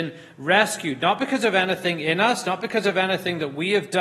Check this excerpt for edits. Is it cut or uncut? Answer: uncut